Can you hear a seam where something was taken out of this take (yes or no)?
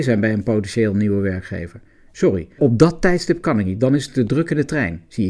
yes